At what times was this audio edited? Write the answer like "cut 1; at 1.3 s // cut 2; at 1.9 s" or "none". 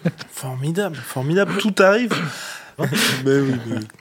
cut 1; at 2.8 s